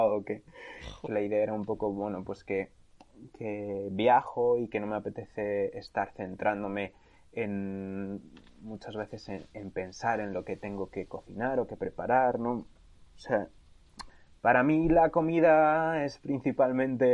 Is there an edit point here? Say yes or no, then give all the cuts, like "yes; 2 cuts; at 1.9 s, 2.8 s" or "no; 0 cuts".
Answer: yes; 1 cut; at 1.1 s